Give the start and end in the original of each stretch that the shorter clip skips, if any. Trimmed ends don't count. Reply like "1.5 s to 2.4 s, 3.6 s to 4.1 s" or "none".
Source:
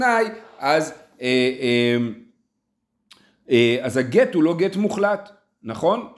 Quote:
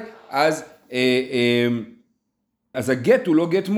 3.0 s to 3.8 s